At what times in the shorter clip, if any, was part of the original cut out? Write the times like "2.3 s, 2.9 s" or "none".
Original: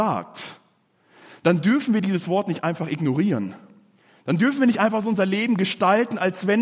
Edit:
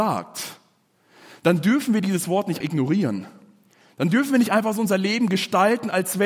2.6 s